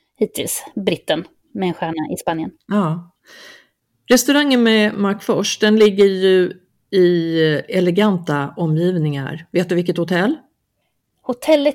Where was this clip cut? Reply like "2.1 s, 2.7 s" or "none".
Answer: none